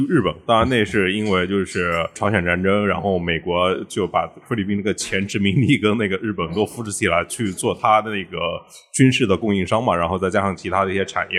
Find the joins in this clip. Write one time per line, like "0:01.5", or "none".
none

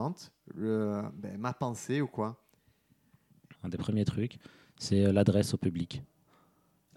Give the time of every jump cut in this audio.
0:03.6

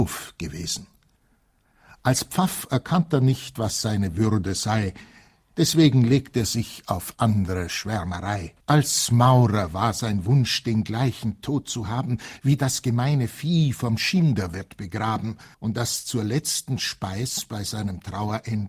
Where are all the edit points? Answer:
0:08.6
0:15.5

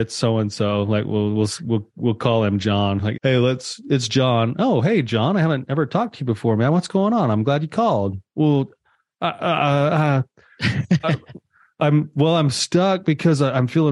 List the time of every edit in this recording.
0:03.1

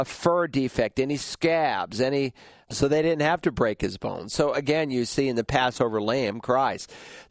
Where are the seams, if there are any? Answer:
0:02.6

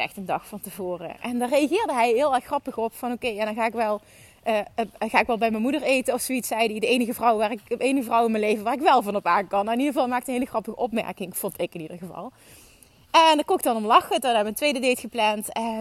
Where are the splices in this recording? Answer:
none

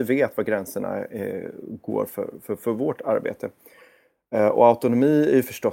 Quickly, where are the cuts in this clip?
none

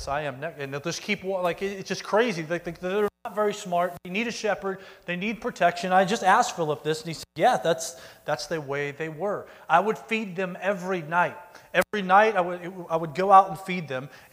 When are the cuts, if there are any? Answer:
none

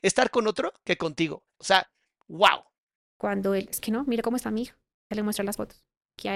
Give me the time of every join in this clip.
0:01.6
0:03.0

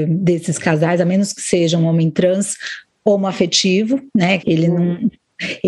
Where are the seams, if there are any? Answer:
0:04.4

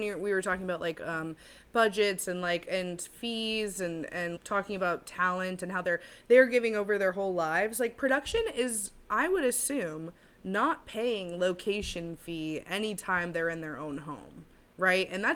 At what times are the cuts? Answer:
0:04.4

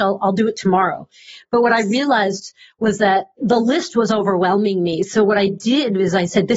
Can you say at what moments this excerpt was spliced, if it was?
none

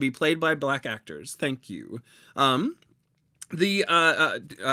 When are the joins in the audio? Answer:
none

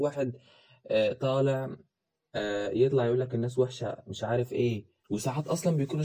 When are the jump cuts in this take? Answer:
0:05.0

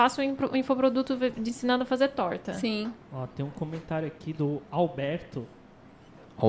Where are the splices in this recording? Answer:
0:03.0

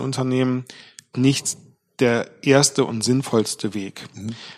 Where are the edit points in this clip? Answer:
0:01.1

